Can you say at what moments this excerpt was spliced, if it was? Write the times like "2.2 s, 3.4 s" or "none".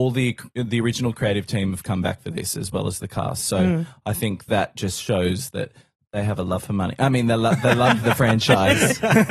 8.0 s